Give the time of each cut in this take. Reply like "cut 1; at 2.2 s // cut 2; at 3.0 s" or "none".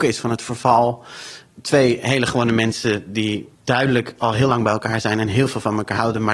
cut 1; at 3.5 s

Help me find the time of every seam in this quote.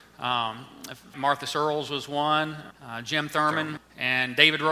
cut 1; at 1.1 s // cut 2; at 2.7 s // cut 3; at 3.8 s

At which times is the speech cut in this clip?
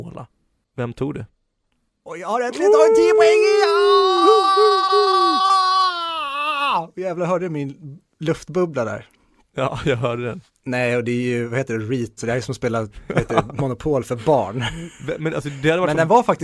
cut 1; at 1.9 s // cut 2; at 10.5 s // cut 3; at 12.2 s

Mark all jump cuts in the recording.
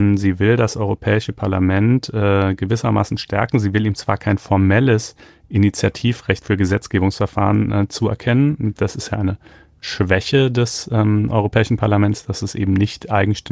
none

